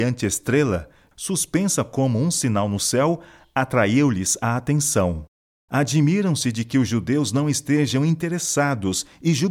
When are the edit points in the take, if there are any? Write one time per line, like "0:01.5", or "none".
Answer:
0:01.1
0:05.6